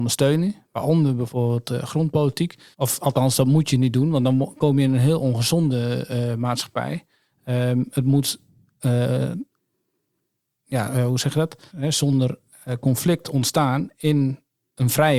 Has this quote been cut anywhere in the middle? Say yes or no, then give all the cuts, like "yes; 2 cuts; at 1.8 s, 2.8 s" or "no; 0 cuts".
yes; 2 cuts; at 2.7 s, 11.7 s